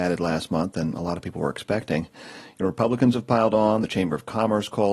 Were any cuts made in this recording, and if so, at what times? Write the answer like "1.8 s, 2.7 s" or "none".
none